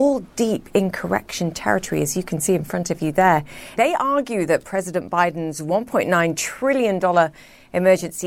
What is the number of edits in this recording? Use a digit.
1